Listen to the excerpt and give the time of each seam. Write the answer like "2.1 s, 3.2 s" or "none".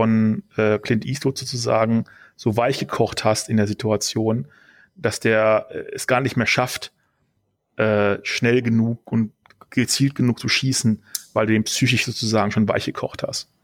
none

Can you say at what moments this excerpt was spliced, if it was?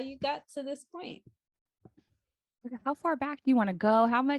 none

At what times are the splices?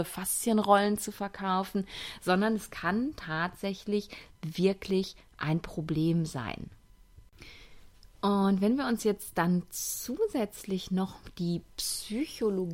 none

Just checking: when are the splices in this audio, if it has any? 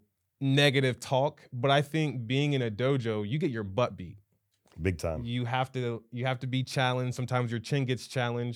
none

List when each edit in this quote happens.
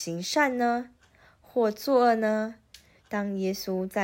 3.0 s

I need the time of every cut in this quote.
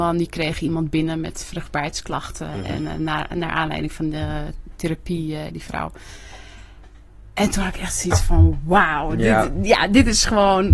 5.5 s

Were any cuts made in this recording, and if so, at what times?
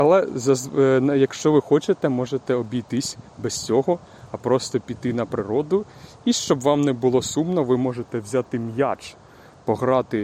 none

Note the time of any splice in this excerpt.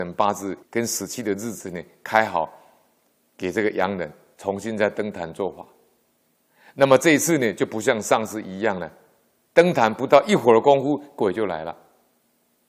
none

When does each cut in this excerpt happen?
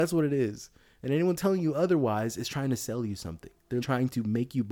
3.8 s

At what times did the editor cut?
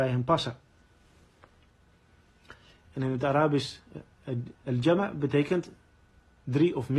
2.8 s, 4.5 s

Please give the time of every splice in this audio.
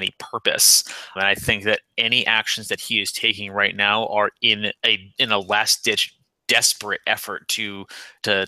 1.2 s, 4.8 s

